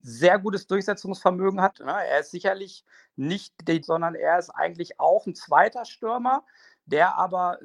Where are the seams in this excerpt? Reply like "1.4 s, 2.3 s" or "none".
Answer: 1.7 s, 3.8 s